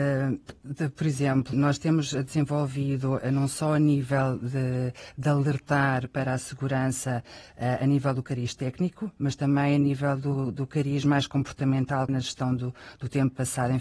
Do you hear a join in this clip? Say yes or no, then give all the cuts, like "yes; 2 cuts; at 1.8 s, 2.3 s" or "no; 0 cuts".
yes; 2 cuts; at 1.5 s, 12.1 s